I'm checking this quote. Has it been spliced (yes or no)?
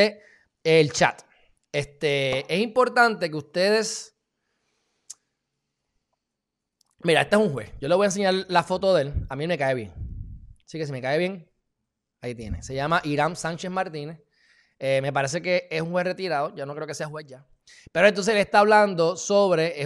yes